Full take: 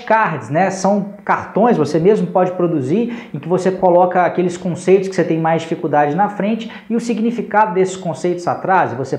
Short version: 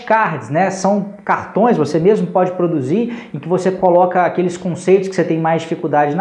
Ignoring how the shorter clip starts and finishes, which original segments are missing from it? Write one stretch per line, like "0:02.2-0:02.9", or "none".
none